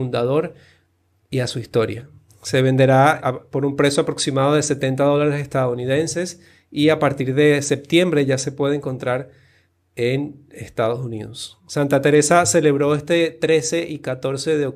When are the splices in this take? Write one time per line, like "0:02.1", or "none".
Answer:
0:03.2